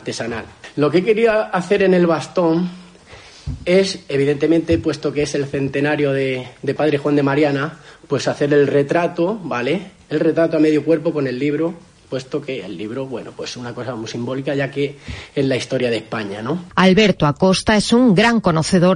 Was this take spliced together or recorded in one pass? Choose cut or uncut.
uncut